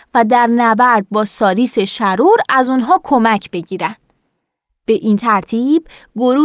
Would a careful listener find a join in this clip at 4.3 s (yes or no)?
no